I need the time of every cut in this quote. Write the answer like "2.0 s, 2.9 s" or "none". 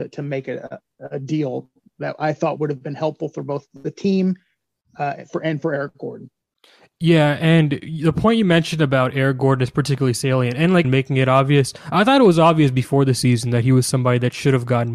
10.8 s